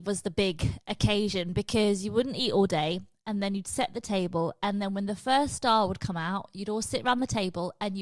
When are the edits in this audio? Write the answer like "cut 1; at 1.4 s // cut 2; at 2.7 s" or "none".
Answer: none